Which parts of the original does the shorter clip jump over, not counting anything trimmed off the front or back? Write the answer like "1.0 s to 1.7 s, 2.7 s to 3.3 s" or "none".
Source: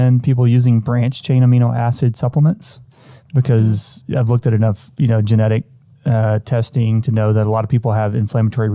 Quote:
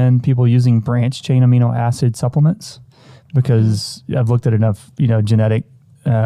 none